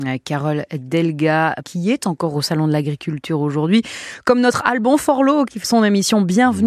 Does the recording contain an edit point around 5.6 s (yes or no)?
yes